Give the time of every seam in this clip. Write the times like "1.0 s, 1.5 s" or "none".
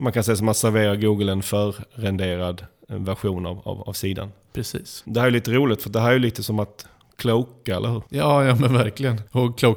none